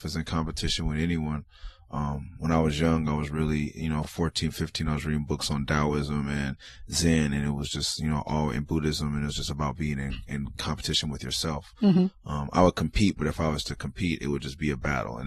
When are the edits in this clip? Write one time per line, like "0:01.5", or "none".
none